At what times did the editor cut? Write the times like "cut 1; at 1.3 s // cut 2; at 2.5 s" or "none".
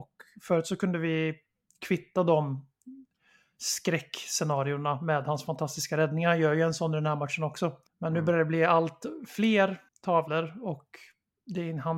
cut 1; at 7.9 s // cut 2; at 9.9 s